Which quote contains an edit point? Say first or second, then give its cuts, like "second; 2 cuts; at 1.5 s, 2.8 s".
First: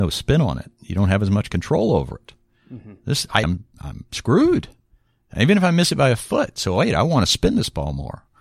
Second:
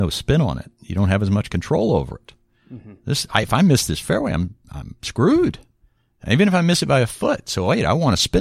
first; 1 cut; at 3.4 s